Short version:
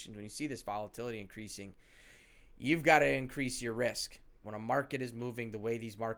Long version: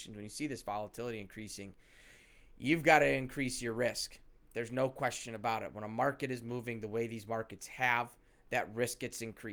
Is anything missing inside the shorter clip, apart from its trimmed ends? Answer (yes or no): yes